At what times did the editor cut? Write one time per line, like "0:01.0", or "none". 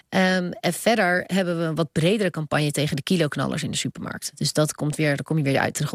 none